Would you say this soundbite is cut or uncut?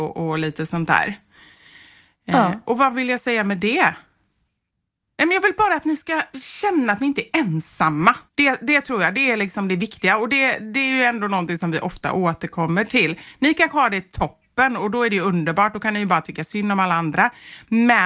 cut